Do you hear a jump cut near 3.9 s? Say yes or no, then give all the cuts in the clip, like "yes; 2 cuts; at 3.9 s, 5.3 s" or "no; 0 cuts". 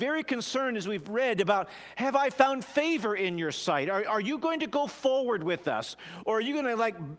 no; 0 cuts